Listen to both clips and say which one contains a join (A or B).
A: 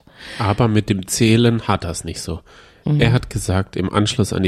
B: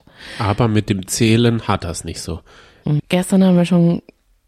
B